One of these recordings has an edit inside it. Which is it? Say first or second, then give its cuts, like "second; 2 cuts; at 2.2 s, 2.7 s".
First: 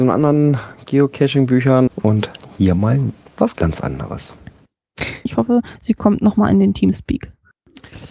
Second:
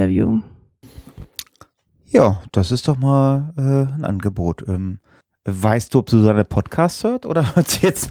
first; 2 cuts; at 1.9 s, 5.3 s